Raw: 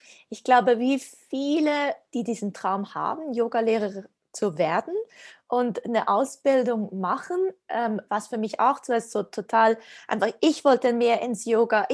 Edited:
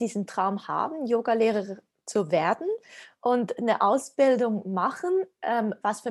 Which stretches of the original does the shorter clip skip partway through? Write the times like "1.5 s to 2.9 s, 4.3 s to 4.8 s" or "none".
none